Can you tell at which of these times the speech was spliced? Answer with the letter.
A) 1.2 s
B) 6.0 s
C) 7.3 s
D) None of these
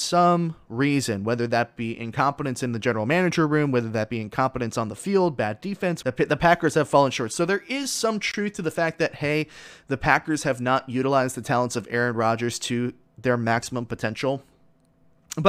B